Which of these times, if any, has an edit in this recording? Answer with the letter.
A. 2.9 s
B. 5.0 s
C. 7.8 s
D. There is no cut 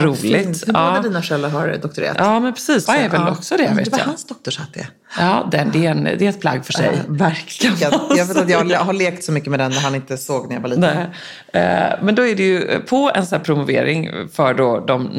A